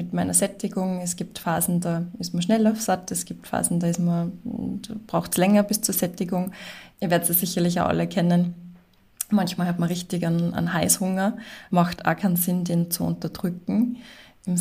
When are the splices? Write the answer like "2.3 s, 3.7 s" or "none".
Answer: 6.9 s, 11.7 s